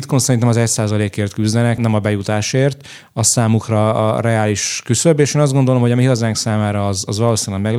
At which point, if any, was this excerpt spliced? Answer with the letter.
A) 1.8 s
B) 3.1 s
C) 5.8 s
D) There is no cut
A